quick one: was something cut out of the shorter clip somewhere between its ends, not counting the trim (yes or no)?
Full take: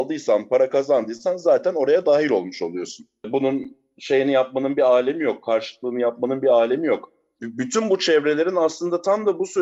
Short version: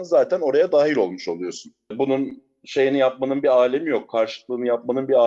no